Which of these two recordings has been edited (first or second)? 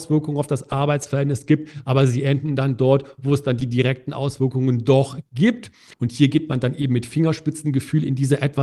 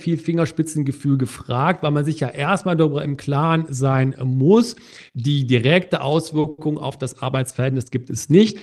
first